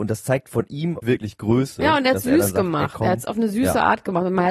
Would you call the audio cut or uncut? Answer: cut